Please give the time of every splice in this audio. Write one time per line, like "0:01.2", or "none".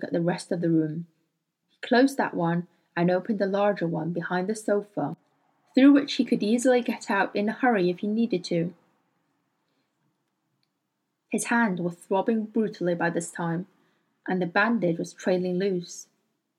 0:01.6